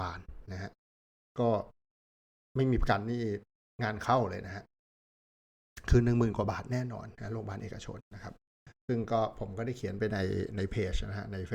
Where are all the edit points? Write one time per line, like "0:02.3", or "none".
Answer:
0:08.0